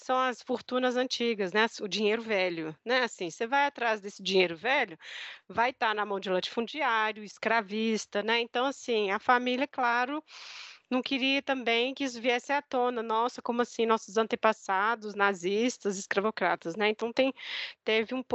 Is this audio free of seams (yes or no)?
yes